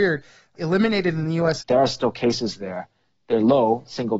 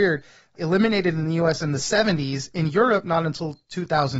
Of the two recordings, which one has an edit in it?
first; 1 cut; at 1.6 s

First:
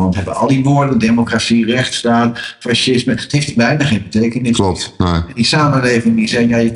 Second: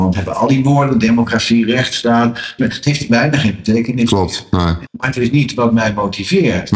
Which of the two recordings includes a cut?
second; 2 cuts; at 2.6 s, 4.9 s

